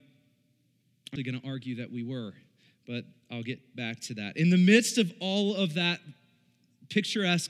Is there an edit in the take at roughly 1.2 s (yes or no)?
yes